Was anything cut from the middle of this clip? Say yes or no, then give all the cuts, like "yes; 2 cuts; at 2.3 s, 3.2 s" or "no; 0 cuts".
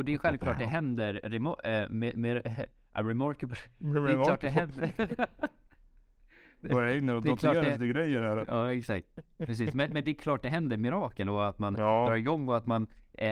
no; 0 cuts